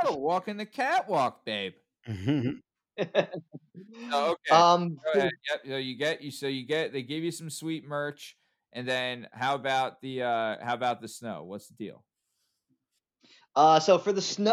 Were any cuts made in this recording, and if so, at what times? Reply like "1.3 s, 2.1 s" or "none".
none

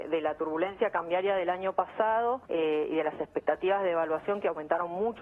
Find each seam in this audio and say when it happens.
2.5 s

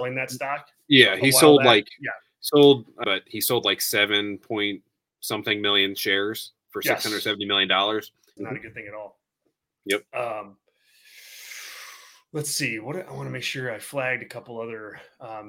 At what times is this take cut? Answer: 3.0 s, 8.4 s

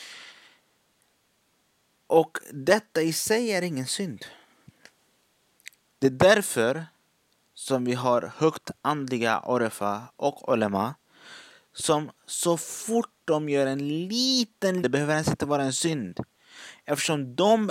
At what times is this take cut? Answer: 6.0 s, 14.8 s

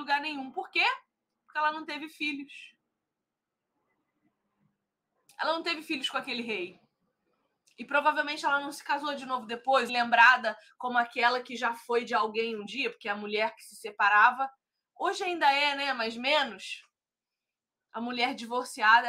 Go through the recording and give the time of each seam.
9.9 s

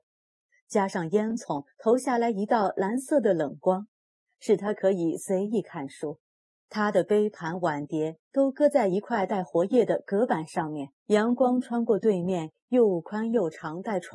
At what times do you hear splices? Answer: 6.6 s, 11.0 s

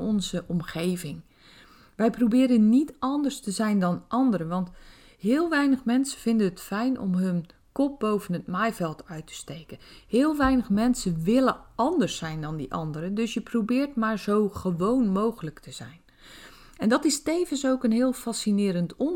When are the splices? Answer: none

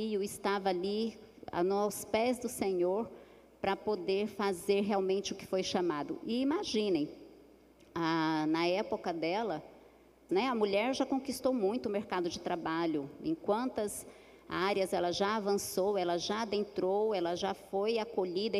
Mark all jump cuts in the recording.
10.3 s

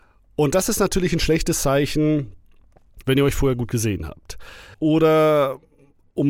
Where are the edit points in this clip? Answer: 3.0 s, 4.7 s

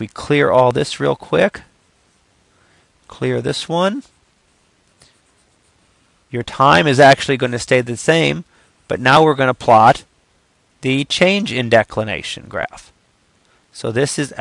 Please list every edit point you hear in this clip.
none

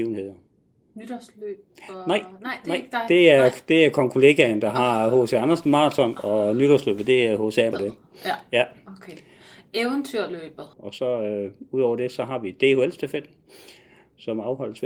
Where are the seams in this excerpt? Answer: 7.7 s, 10.7 s

